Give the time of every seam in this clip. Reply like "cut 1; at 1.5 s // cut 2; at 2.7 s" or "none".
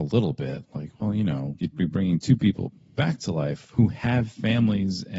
cut 1; at 1.6 s